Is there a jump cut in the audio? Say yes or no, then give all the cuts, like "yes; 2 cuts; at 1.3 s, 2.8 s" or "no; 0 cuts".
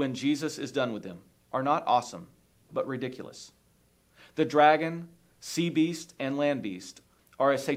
no; 0 cuts